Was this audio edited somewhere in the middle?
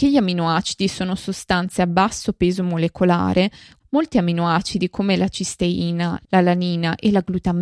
yes; 2 cuts; at 3.8 s, 6.2 s

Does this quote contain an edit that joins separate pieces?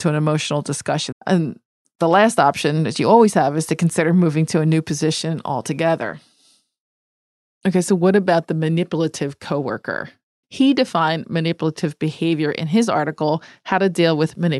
yes; 2 cuts; at 1.1 s, 10.4 s

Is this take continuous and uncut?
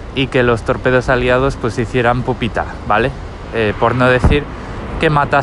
yes; 0 cuts

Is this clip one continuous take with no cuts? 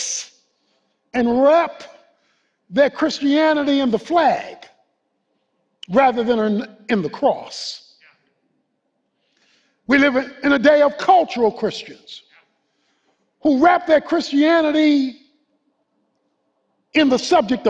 yes; 0 cuts

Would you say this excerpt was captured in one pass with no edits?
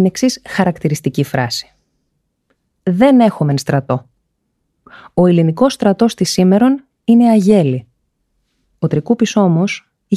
yes; 0 cuts

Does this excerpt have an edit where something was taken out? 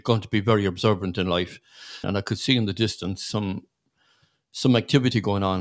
yes; 1 cut; at 2.0 s

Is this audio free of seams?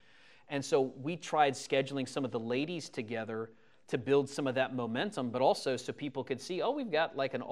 yes; 0 cuts

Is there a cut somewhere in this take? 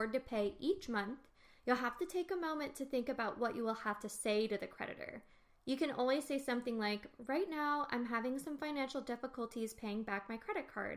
no; 0 cuts

